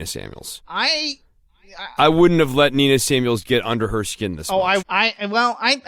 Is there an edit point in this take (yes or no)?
yes